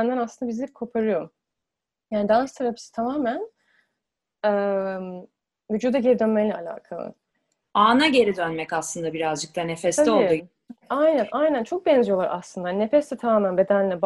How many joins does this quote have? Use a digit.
0